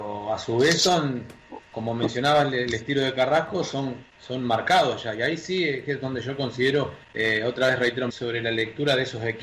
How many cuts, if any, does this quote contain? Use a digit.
2